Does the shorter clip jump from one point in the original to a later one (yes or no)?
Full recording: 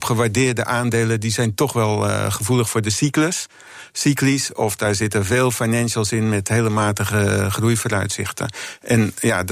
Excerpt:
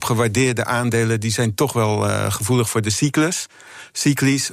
no